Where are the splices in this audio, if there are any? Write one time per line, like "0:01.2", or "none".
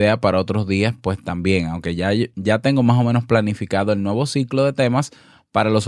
none